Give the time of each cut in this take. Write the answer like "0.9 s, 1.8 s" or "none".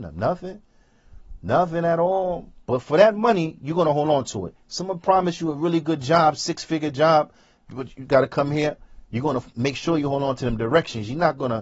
2.6 s